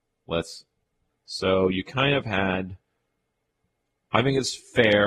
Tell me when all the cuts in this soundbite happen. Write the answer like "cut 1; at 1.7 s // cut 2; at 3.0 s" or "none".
cut 1; at 1.1 s